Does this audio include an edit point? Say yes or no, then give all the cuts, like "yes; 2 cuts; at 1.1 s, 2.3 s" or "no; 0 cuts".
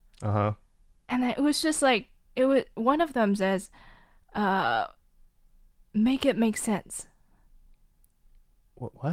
no; 0 cuts